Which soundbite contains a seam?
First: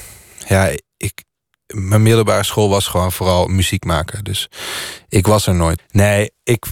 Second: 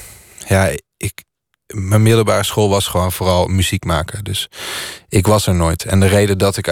first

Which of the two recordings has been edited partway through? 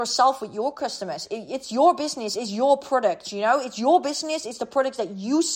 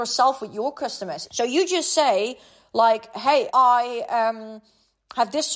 second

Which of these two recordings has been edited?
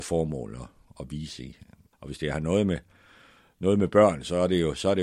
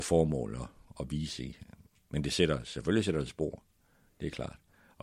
first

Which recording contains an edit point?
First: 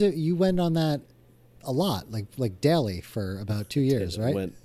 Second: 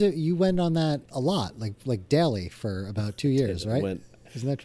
second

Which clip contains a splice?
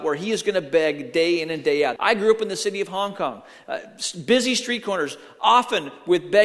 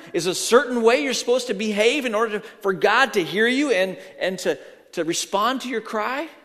first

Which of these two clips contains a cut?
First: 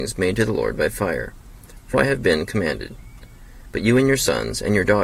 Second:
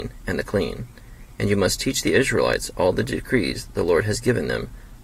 first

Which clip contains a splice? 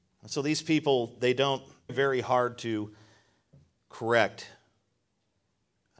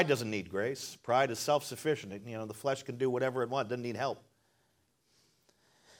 first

